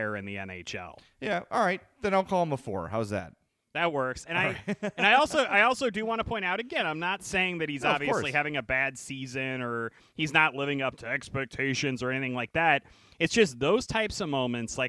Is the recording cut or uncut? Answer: uncut